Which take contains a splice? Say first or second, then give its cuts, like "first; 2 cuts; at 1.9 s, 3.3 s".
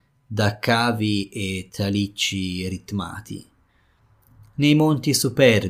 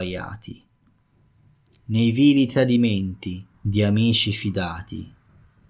second; 1 cut; at 3.5 s